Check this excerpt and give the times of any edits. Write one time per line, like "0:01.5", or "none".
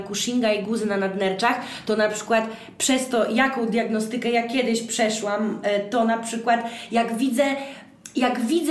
none